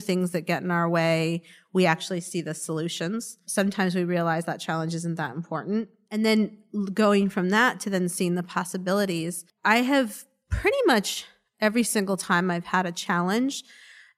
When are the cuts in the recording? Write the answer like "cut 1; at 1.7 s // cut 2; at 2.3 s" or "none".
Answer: none